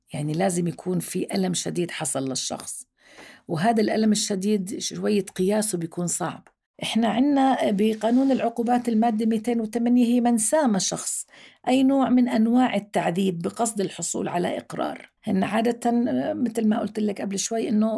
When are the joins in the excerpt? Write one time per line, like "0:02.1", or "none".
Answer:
0:15.2